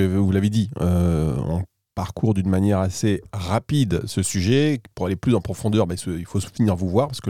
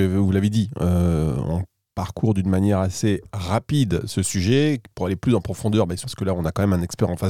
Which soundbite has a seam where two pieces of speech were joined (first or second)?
second